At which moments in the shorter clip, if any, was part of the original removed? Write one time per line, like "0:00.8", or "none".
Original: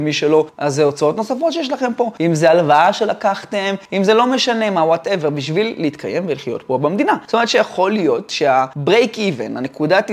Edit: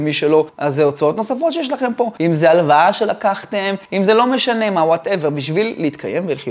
none